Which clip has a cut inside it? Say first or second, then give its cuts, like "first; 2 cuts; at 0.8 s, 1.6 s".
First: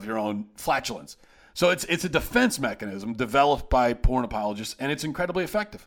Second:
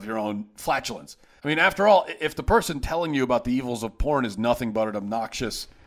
second; 1 cut; at 1.4 s